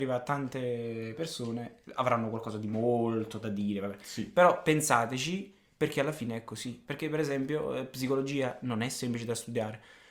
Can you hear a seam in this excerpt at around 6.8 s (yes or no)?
yes